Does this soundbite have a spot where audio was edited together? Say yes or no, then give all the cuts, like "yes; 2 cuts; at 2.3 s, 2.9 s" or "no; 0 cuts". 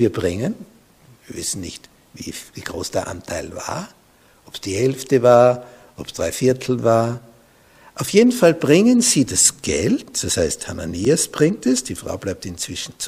no; 0 cuts